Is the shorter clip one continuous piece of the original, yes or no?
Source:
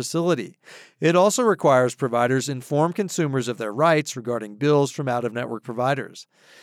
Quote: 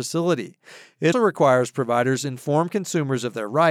no